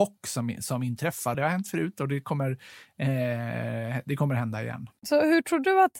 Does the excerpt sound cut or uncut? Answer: cut